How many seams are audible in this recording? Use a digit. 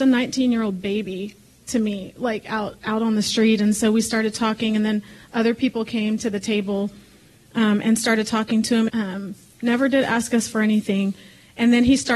1